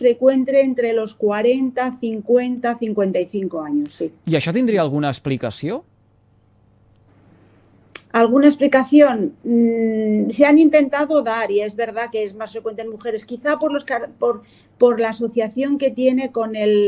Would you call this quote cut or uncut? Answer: uncut